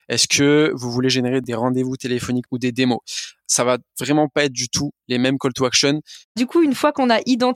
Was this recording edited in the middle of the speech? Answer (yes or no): yes